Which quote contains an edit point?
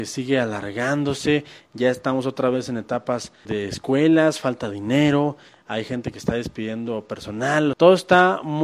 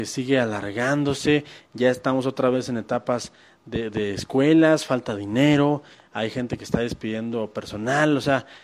first; 2 cuts; at 3.5 s, 7.7 s

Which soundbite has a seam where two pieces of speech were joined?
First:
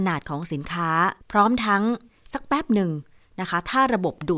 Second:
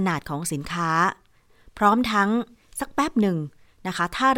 first; 1 cut; at 1.2 s

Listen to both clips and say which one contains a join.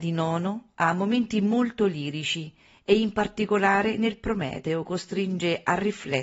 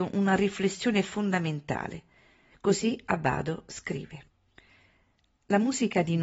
second; 1 cut; at 2.5 s

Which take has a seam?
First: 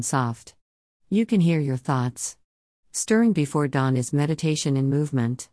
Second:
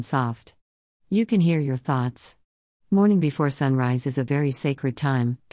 second; 1 cut; at 2.8 s

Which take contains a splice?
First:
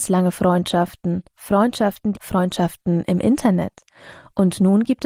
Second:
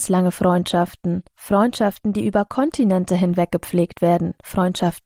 first; 1 cut; at 2.1 s

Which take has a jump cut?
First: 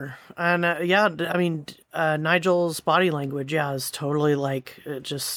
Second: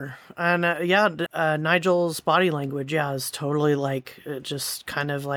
second; 1 cut; at 1.3 s

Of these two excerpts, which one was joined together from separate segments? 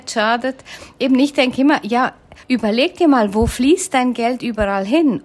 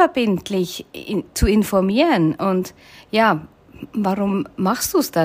first; 1 cut; at 2.4 s

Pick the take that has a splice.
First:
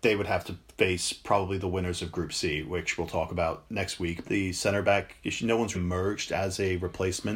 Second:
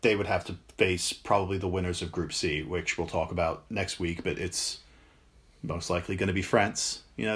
first; 2 cuts; at 4.2 s, 5.7 s

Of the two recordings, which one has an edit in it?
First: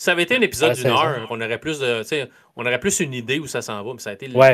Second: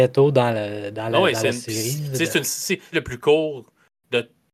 second; 1 cut; at 2.9 s

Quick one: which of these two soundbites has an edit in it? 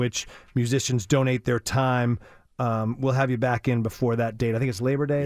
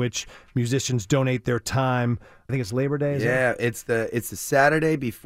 second; 1 cut; at 2.5 s

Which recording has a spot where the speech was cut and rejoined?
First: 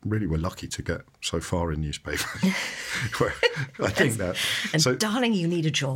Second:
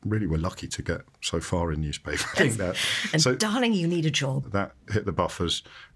second; 2 cuts; at 2.3 s, 4.4 s

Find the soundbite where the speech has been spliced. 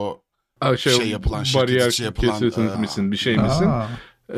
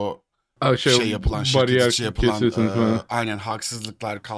first; 1 cut; at 2.7 s

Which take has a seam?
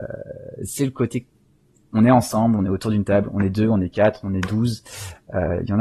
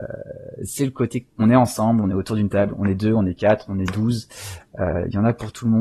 second; 1 cut; at 1.3 s

